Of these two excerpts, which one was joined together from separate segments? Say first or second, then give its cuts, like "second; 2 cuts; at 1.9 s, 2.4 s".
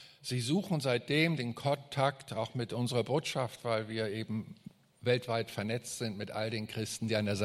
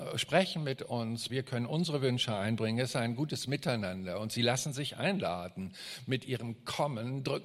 second; 1 cut; at 1.3 s